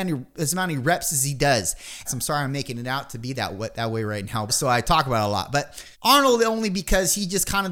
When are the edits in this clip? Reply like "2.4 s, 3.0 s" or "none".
2.1 s, 4.5 s, 5.9 s